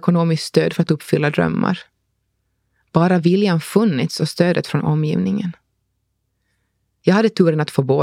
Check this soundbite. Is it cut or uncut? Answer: uncut